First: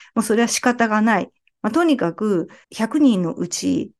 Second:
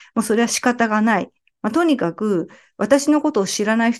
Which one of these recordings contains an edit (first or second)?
first